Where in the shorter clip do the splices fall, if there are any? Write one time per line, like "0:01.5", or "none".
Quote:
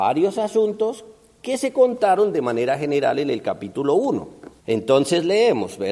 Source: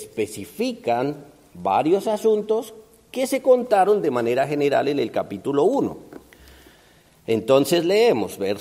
0:04.6